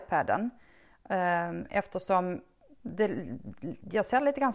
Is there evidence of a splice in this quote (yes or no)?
no